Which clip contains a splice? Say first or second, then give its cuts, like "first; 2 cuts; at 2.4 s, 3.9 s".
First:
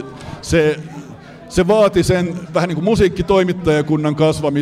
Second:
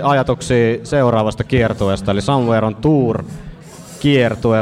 first; 1 cut; at 2.5 s